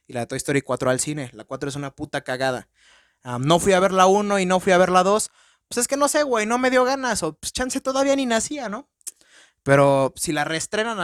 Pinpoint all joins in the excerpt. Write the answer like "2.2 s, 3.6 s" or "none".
none